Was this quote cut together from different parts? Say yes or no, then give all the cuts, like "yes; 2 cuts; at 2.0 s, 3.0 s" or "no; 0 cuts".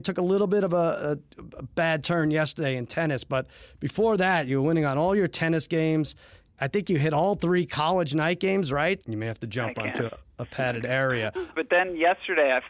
yes; 3 cuts; at 9.0 s, 10.1 s, 11.5 s